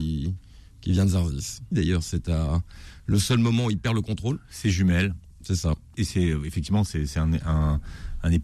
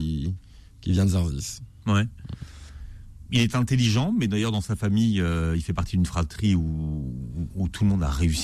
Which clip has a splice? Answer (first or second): first